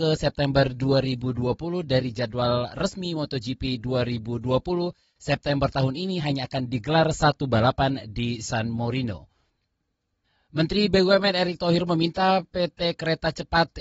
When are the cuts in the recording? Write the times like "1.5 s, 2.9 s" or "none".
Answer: none